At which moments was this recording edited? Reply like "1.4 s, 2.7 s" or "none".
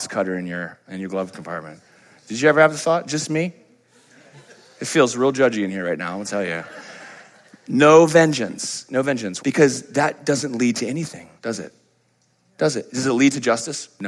9.4 s, 11.4 s